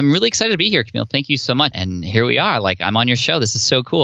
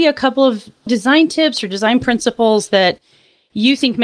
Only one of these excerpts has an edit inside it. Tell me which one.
first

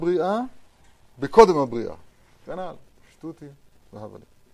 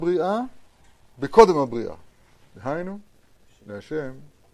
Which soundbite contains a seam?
first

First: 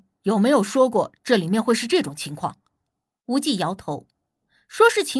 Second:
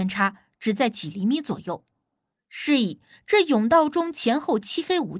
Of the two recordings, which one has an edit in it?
first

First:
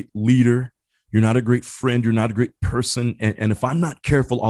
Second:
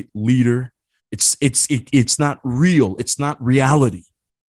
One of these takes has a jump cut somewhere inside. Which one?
second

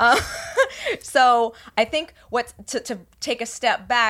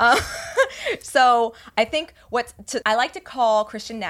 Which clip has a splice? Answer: second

